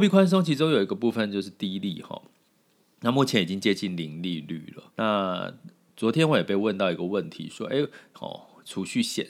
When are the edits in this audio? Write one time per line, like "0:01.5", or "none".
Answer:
0:04.9
0:08.1